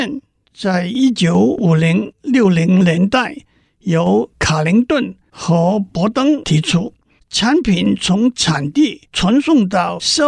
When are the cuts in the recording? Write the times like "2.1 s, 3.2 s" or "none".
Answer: 7.2 s